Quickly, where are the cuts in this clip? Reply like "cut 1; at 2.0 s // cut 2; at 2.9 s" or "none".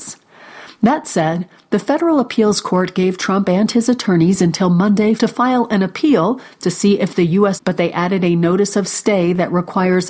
cut 1; at 5.2 s // cut 2; at 7.6 s